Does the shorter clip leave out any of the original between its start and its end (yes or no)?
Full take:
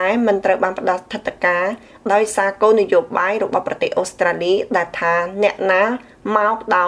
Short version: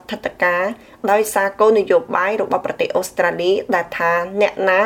no